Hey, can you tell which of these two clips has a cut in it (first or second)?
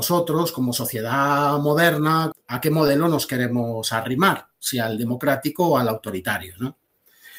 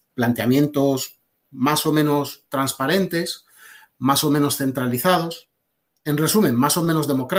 first